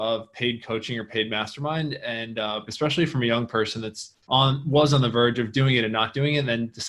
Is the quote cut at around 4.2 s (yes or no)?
yes